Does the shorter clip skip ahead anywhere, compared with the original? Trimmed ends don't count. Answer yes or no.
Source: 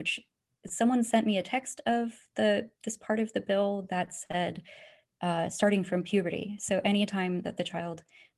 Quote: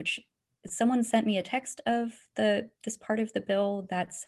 no